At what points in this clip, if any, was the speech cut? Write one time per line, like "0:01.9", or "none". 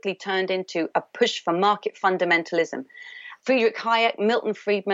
0:03.4